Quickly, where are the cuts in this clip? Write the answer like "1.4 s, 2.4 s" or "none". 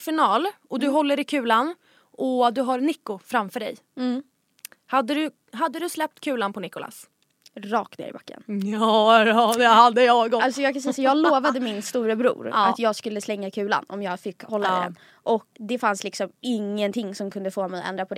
15.5 s

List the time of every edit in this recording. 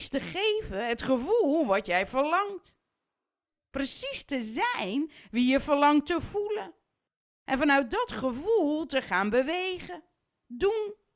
none

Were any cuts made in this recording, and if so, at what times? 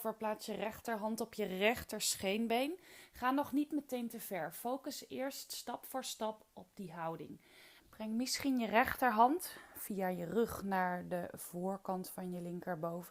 7.8 s

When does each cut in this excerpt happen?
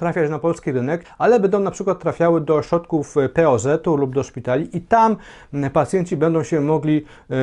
1.0 s

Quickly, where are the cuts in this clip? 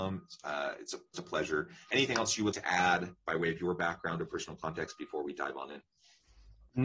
1.1 s, 2.5 s

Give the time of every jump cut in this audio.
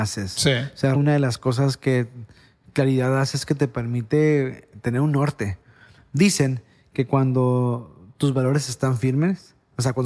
0.9 s

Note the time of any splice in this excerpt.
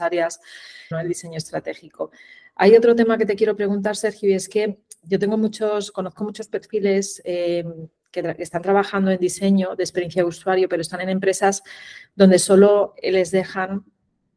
0.9 s

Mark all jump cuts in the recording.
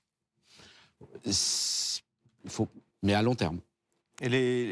2.9 s

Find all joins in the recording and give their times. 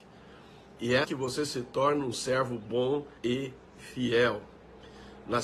1.0 s, 3.2 s

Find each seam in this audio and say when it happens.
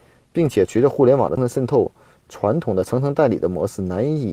1.4 s

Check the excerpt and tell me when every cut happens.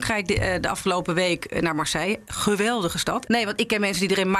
3.3 s

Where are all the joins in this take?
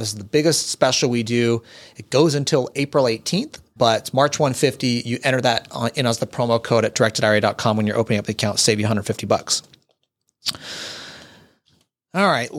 3.8 s

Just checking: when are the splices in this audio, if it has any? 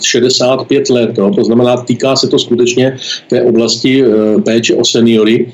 none

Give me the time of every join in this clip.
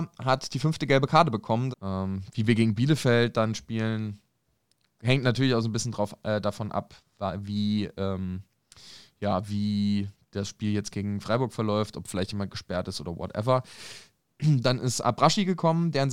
1.7 s, 14.3 s

